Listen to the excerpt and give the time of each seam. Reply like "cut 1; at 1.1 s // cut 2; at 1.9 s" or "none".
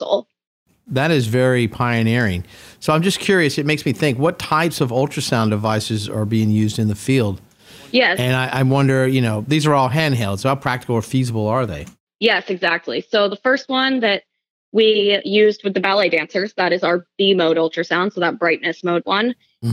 none